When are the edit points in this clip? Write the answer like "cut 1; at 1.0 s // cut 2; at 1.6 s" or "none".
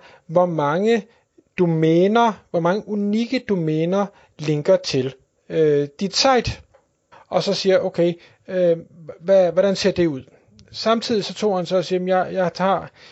cut 1; at 7.1 s